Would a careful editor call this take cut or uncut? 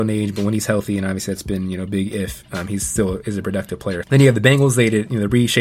cut